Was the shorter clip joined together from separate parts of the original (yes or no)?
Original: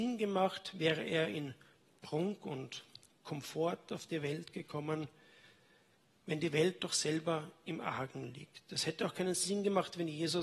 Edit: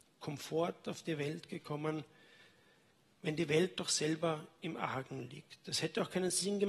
no